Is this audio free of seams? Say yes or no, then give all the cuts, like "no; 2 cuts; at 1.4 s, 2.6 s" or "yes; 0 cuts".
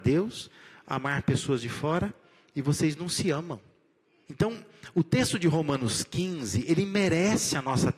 no; 1 cut; at 4.2 s